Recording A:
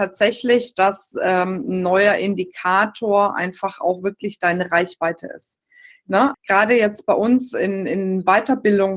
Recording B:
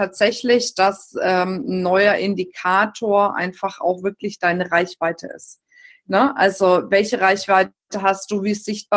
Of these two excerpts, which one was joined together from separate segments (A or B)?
A